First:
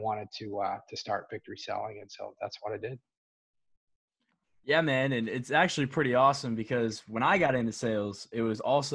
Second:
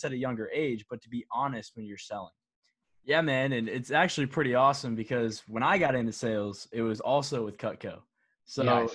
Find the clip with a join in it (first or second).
second